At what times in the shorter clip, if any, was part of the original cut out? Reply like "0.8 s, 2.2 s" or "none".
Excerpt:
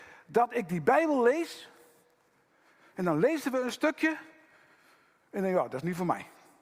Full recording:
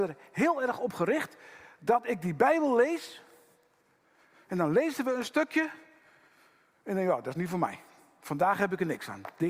none